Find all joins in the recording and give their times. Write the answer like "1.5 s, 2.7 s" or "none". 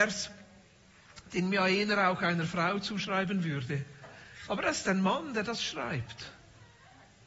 4.5 s